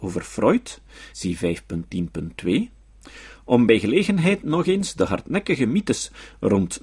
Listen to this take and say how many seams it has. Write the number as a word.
one